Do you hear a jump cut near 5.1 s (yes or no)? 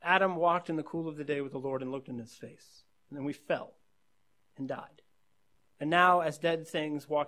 no